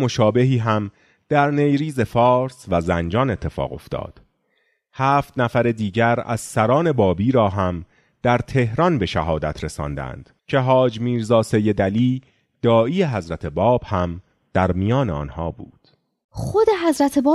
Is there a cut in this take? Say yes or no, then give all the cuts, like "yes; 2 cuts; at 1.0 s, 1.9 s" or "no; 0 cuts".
yes; 1 cut; at 10.4 s